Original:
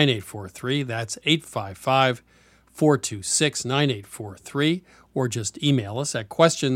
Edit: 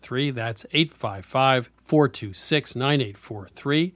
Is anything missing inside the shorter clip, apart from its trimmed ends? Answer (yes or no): yes